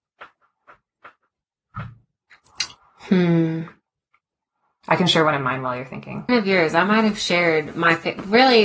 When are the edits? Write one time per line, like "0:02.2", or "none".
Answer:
0:06.3